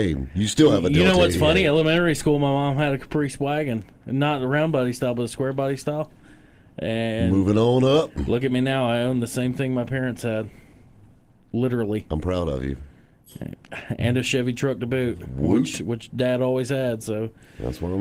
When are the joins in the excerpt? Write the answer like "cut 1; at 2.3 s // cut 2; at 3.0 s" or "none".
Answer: none